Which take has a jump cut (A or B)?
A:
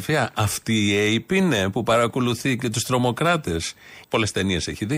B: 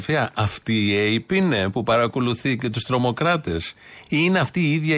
A